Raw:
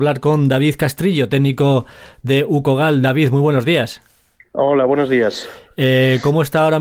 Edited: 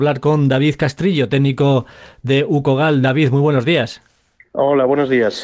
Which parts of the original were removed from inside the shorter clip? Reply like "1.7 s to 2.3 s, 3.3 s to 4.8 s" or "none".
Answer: none